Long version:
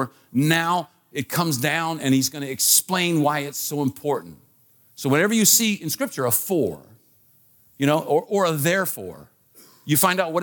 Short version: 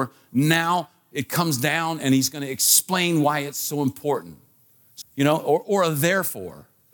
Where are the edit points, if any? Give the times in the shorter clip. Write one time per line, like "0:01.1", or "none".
0:05.0